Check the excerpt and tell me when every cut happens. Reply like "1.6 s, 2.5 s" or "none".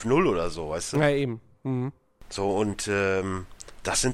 none